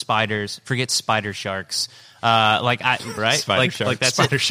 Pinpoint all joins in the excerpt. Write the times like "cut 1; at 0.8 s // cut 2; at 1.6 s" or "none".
cut 1; at 3.2 s